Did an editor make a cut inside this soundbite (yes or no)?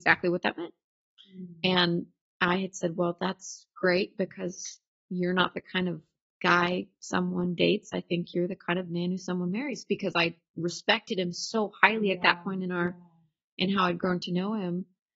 no